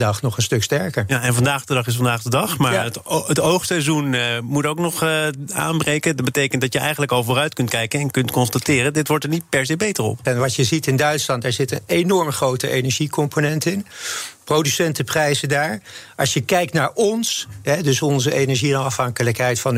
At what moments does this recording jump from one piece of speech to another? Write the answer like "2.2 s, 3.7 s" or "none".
10.3 s